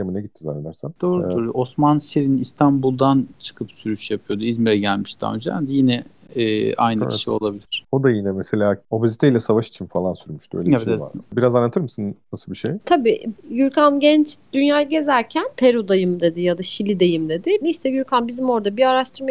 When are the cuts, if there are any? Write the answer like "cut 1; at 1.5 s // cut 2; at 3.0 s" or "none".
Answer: cut 1; at 0.9 s // cut 2; at 11.2 s // cut 3; at 17.6 s